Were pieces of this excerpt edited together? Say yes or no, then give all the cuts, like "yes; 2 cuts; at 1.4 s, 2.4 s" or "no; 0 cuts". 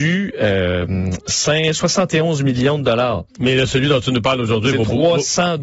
yes; 1 cut; at 3.3 s